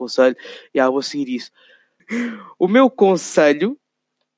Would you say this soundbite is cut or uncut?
cut